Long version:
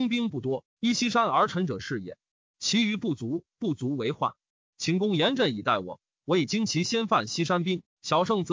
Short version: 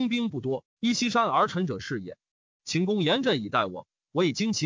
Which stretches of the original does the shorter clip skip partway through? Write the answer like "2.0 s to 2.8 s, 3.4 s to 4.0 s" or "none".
2.5 s to 4.6 s